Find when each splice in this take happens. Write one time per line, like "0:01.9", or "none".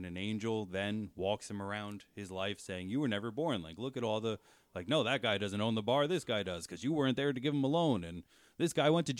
none